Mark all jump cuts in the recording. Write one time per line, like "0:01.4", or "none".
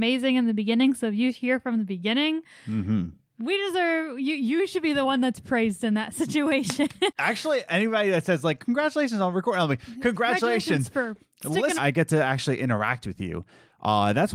0:07.1
0:11.8